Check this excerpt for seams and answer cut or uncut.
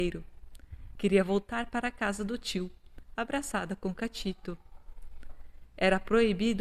cut